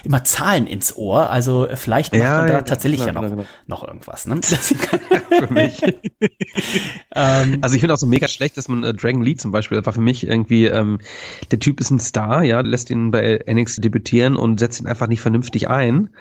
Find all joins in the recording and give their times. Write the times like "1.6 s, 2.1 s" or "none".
4.4 s, 12.6 s, 13.8 s